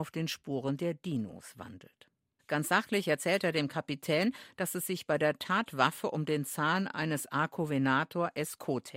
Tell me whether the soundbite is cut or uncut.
uncut